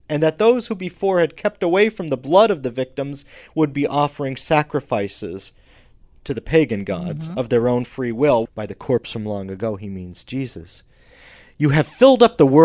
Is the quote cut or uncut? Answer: cut